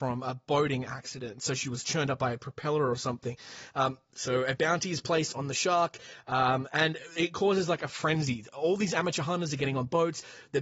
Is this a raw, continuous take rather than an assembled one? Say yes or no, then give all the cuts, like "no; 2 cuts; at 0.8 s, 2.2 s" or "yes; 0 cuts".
no; 1 cut; at 3.7 s